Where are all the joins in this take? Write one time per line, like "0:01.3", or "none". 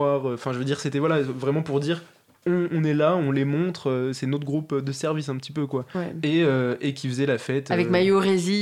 0:02.7

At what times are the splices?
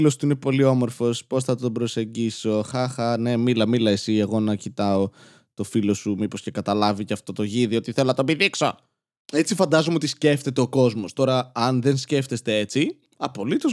none

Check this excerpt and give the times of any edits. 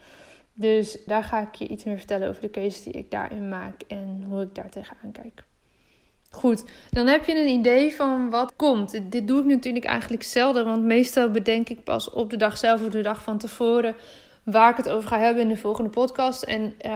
0:01.1
0:08.5

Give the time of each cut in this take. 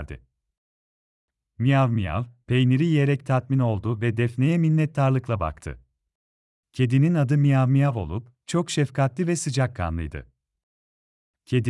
0:06.6

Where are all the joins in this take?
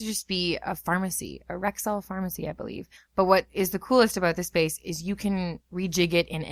0:03.0

